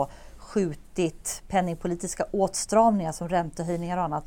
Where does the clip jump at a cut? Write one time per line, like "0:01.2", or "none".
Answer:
none